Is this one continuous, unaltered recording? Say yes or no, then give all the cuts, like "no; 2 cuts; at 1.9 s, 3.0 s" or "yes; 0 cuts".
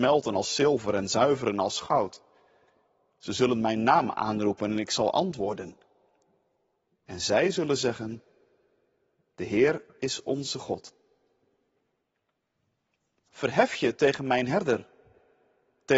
no; 2 cuts; at 6.9 s, 13.3 s